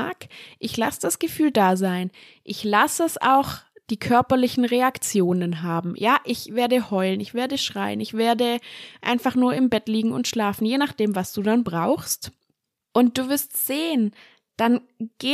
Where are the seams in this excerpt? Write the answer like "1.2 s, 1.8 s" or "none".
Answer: none

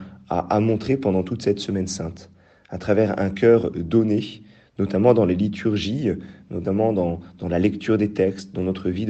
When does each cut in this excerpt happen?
none

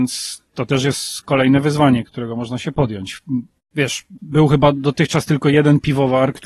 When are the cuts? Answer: 2.1 s, 3.6 s

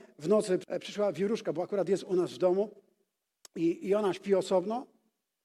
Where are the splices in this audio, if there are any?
none

